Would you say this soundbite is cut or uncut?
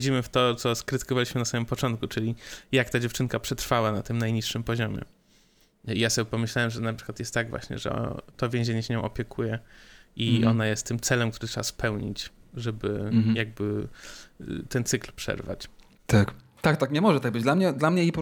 cut